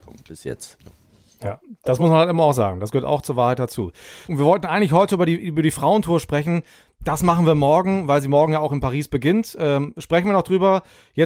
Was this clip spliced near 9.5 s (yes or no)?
no